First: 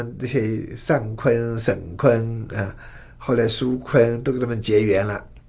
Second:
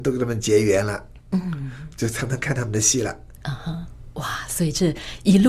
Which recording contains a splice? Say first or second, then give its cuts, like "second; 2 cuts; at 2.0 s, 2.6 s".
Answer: second; 1 cut; at 3.4 s